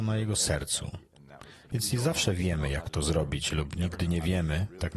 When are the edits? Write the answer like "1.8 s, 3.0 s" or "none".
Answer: 1.7 s